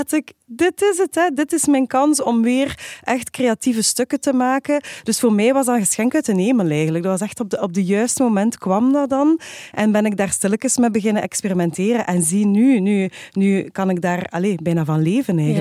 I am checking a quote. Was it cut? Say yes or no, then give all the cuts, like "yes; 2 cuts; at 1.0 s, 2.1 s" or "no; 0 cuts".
no; 0 cuts